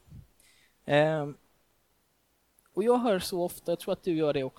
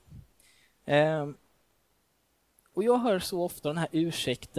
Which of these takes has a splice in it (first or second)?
second